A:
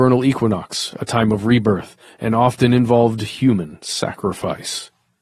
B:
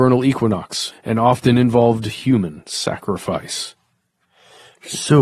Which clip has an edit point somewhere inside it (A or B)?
B